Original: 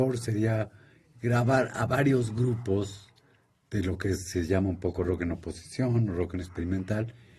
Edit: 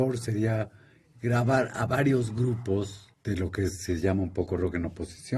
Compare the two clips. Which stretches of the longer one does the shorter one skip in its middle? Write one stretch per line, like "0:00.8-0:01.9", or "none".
0:03.1-0:03.6